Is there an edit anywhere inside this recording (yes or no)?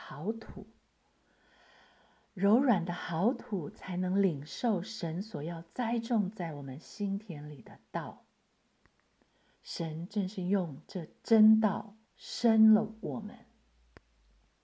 yes